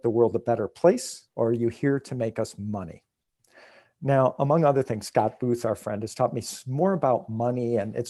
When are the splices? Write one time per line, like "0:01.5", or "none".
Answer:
0:01.3